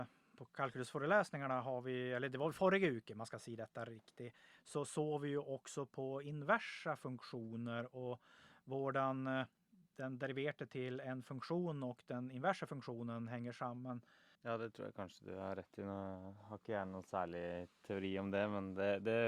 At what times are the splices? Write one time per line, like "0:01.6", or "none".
0:14.4